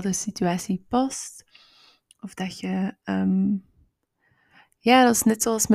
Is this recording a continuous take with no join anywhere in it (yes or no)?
yes